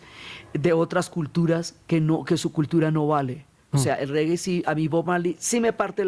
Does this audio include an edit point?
yes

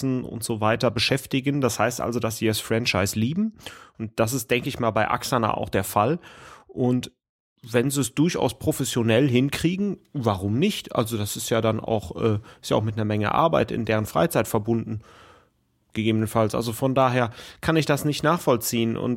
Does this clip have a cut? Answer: no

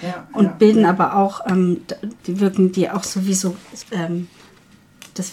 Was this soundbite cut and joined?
yes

